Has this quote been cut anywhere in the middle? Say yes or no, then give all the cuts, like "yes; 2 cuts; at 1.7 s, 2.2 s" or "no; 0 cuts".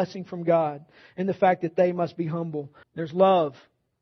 yes; 1 cut; at 2.8 s